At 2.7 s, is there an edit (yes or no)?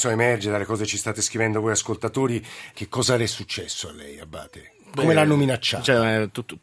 yes